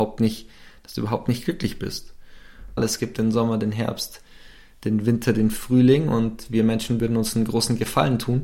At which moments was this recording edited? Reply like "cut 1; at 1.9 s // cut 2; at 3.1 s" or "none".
cut 1; at 2.8 s